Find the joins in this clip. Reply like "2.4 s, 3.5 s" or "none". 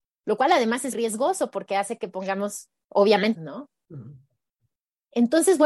0.9 s, 3.4 s